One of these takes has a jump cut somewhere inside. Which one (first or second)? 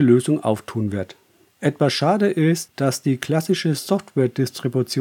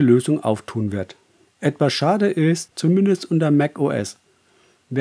second